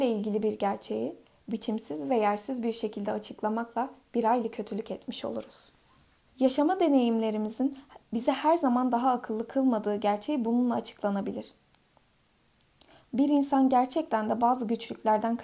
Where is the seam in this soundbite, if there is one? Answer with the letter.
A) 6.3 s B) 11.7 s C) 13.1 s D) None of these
A